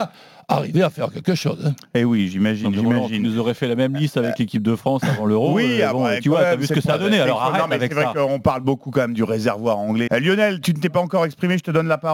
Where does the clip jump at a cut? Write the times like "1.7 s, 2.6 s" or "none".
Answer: 10.1 s